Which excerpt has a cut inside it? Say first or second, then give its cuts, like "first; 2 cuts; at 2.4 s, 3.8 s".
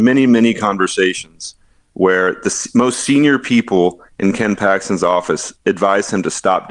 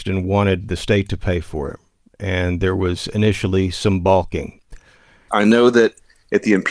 second; 1 cut; at 5.3 s